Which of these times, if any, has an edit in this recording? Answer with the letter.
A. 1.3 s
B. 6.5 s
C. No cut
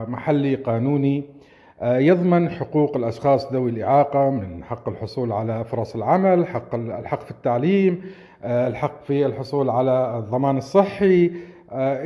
C